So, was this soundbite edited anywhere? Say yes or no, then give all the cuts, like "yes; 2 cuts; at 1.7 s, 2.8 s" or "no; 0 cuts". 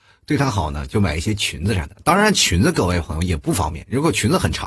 no; 0 cuts